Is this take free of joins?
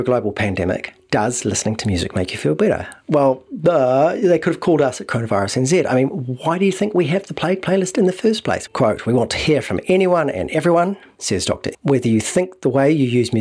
no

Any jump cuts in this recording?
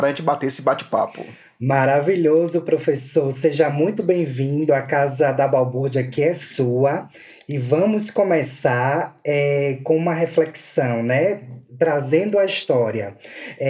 no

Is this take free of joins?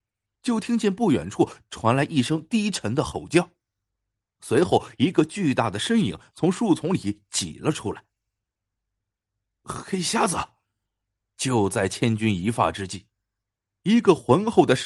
no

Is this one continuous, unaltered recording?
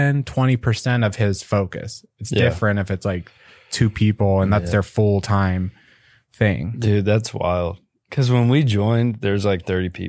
yes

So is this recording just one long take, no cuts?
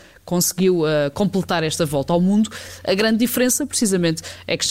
yes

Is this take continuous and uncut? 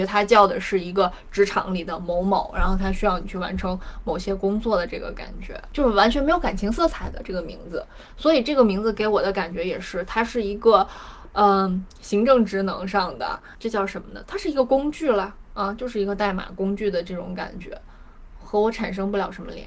yes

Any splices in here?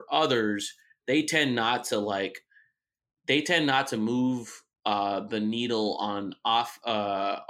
no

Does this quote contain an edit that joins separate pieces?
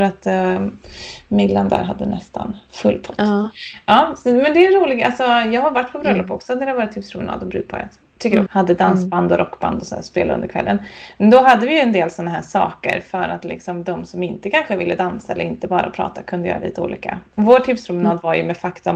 yes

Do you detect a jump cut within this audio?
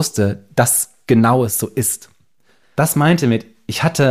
no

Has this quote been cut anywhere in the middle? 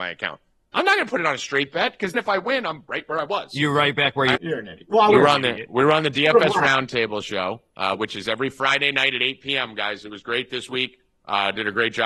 yes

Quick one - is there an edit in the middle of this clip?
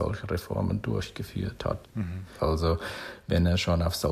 yes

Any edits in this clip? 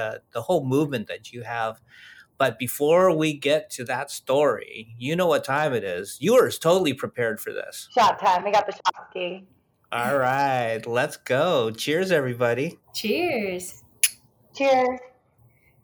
no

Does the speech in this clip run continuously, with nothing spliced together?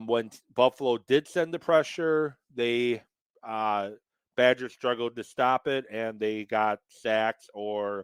yes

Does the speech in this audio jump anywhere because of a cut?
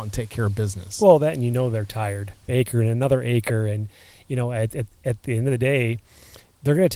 yes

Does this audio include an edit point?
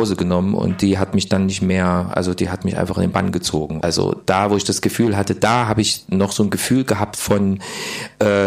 yes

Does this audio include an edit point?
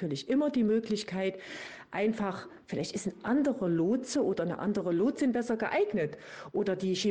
no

